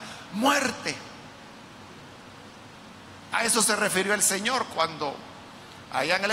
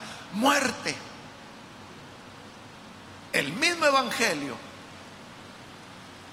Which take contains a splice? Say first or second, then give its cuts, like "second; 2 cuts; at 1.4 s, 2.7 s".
second; 1 cut; at 3.3 s